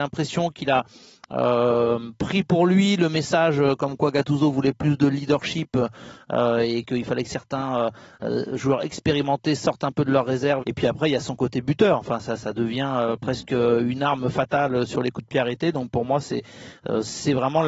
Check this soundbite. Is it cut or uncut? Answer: cut